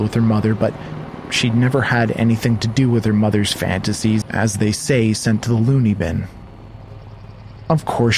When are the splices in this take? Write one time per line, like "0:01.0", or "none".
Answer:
0:04.2